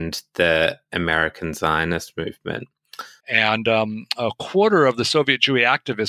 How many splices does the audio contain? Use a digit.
1